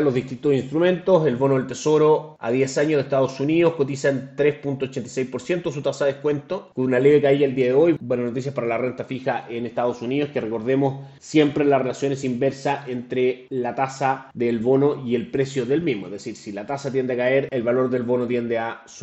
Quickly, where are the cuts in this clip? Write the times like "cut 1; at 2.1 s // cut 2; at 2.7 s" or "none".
none